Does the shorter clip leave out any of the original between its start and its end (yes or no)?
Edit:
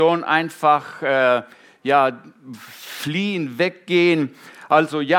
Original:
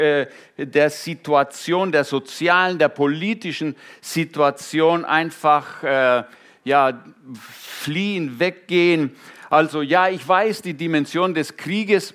no